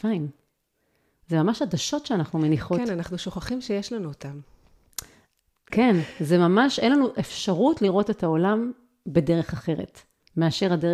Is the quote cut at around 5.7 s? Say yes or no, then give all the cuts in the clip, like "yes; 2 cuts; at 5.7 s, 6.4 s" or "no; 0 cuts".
yes; 1 cut; at 5.7 s